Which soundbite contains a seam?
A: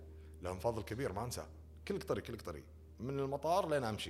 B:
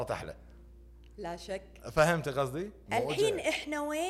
B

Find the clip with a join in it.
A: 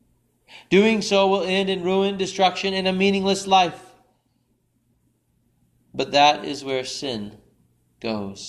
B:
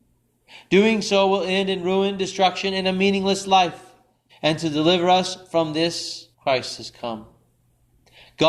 B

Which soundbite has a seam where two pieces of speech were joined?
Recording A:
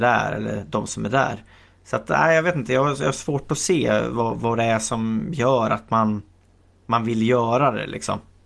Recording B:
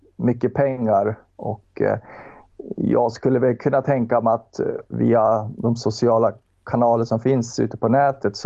B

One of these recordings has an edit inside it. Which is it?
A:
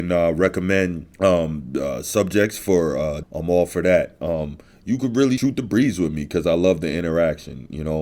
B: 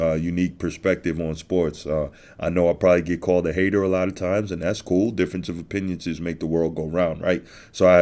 A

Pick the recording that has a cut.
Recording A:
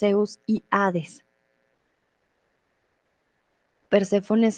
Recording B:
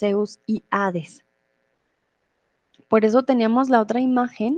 B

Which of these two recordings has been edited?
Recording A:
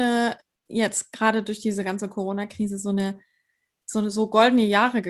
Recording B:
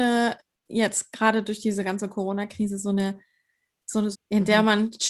B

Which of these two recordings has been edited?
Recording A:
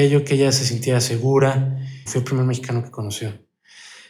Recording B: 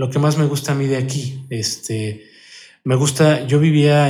A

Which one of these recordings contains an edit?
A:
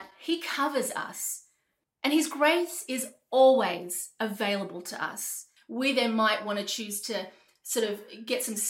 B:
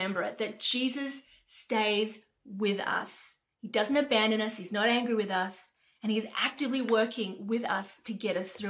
A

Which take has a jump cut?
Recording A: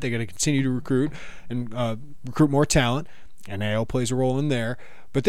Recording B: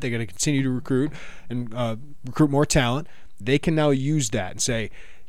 B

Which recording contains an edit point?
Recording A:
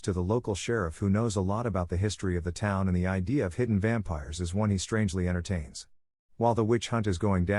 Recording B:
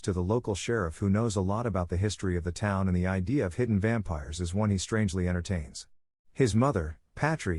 B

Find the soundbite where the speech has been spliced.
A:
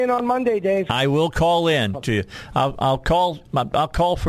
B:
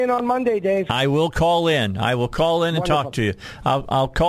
A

